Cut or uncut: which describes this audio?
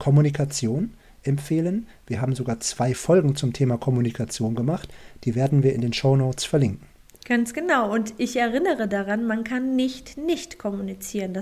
uncut